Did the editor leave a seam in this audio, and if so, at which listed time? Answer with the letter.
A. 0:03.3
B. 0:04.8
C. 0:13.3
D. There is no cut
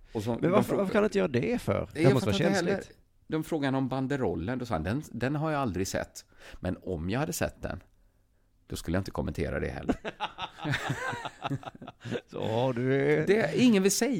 A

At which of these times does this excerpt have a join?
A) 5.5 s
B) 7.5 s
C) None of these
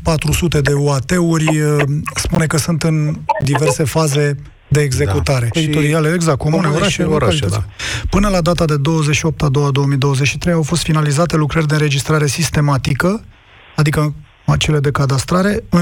A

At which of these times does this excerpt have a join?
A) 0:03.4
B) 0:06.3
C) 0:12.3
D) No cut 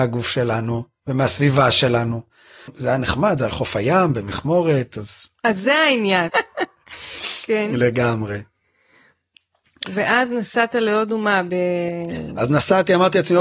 B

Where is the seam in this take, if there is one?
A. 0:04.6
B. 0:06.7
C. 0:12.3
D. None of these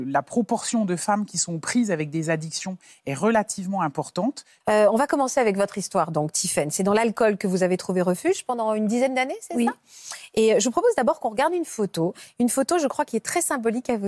A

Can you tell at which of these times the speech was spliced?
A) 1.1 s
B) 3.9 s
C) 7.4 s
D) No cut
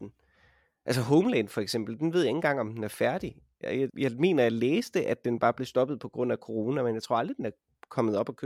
B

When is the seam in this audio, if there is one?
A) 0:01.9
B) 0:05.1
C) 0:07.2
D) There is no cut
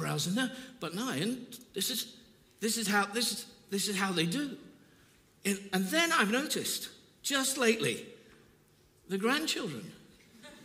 D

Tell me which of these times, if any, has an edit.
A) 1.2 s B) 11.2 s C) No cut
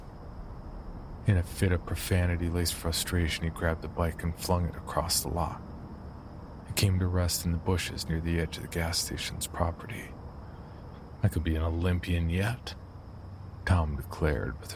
B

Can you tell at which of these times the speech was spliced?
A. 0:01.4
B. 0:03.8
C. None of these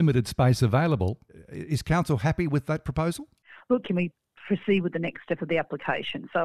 B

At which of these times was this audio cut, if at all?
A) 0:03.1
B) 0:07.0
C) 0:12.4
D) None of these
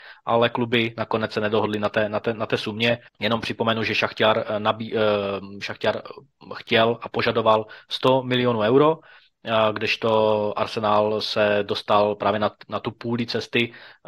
A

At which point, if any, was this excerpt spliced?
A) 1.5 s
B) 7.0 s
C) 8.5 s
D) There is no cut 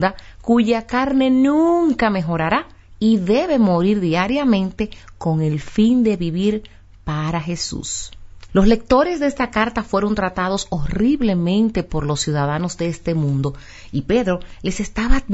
C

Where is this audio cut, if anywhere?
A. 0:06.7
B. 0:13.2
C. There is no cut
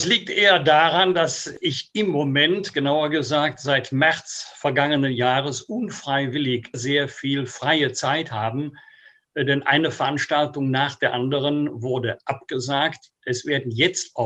A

